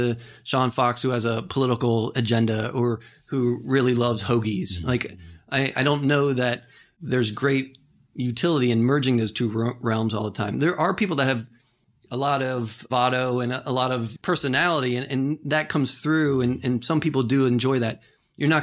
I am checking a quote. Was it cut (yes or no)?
yes